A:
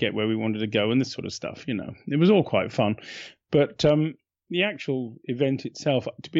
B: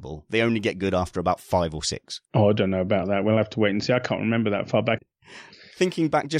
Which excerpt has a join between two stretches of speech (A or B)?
B